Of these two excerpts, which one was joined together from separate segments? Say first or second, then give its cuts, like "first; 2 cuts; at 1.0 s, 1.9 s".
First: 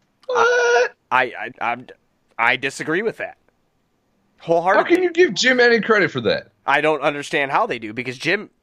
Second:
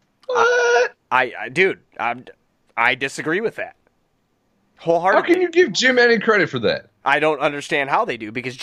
first; 1 cut; at 1.5 s